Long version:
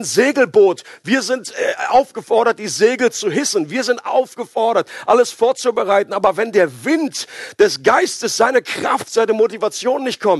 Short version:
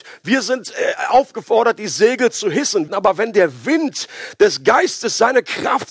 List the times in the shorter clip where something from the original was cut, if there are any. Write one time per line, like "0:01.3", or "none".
0:02.9